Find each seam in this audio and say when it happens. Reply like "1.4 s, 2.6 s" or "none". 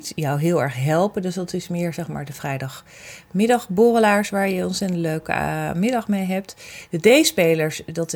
none

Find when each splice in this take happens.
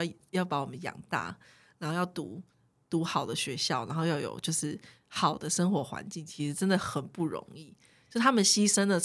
none

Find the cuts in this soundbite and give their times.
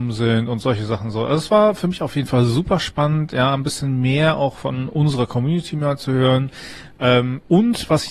none

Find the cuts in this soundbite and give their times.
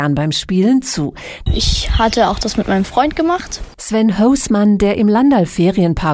1.5 s, 3.7 s

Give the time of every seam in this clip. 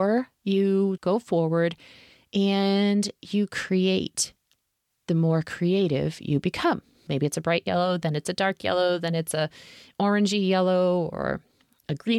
1.0 s, 7.1 s

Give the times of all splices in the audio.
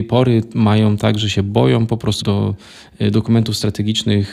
2.2 s

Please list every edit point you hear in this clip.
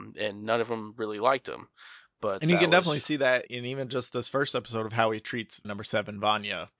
3.5 s, 5.6 s

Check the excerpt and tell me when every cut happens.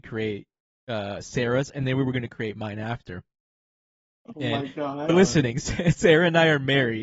5.1 s

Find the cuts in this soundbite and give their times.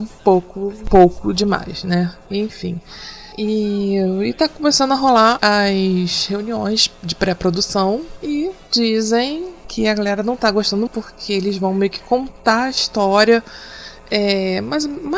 5.4 s, 10.9 s

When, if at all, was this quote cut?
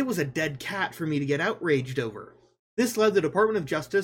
2.7 s

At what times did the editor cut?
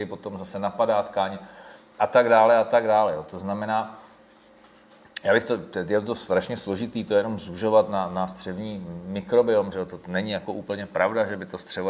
none

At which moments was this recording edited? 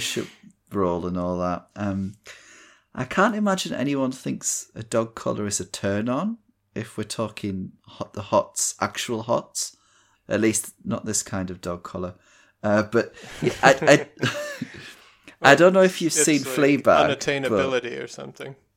10.1 s

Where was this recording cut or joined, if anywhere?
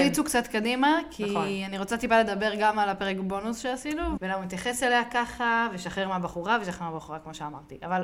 4.2 s

